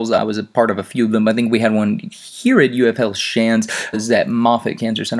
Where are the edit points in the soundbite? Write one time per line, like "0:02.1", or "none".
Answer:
0:03.9